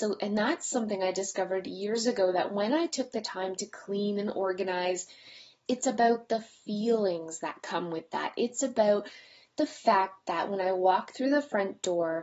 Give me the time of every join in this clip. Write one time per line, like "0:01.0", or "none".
0:05.7